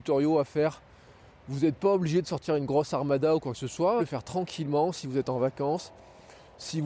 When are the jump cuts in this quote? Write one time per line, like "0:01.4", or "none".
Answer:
0:04.0